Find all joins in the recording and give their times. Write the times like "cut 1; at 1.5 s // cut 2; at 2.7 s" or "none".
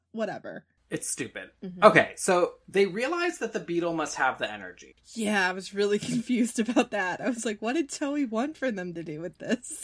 cut 1; at 4.9 s